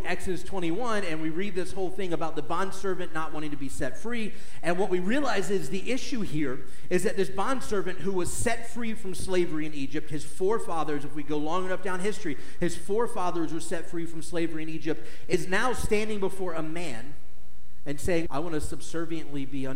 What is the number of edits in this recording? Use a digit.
1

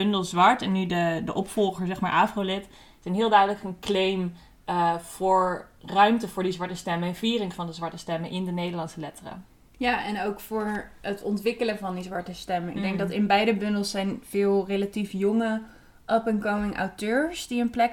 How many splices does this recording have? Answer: 0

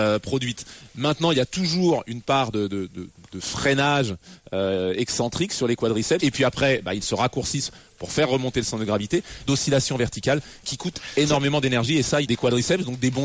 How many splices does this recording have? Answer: 3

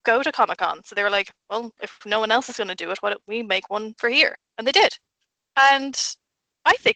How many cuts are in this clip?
0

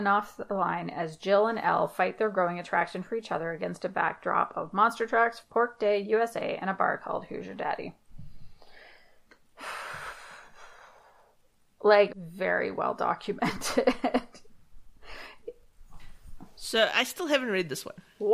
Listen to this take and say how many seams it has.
2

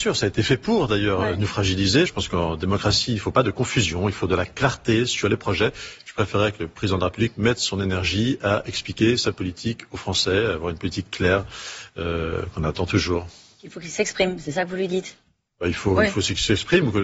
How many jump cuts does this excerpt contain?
1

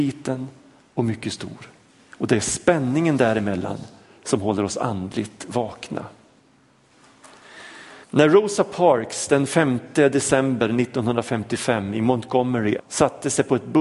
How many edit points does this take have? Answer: 2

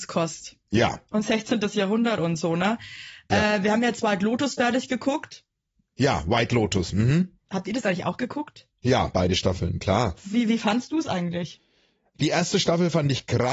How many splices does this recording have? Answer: 0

